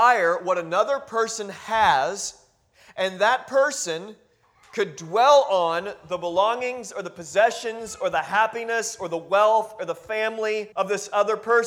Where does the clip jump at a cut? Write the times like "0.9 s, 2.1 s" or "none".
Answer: 10.7 s